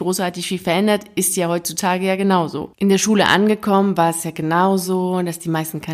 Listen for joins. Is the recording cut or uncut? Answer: cut